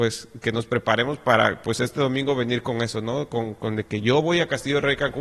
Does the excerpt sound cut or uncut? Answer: uncut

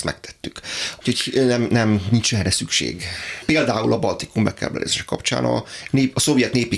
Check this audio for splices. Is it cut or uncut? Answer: cut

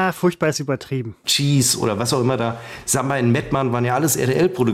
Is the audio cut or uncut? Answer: cut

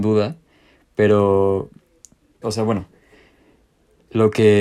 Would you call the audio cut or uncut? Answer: cut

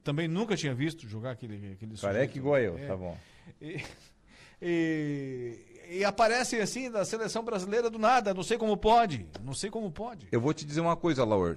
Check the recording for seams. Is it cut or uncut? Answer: uncut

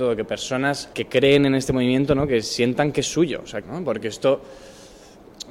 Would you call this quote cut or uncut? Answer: cut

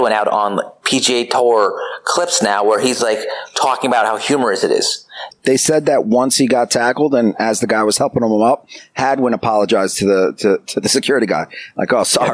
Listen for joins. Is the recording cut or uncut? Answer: cut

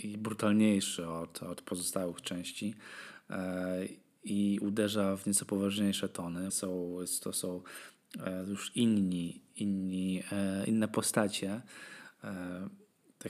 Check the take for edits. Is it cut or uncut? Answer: cut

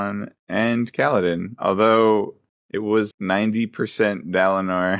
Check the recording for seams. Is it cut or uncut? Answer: cut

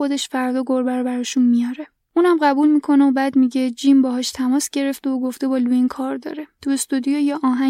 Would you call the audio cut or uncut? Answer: uncut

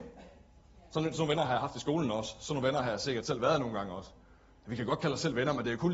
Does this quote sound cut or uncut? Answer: uncut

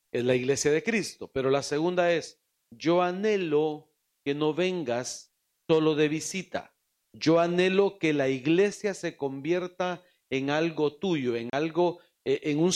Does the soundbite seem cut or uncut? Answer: uncut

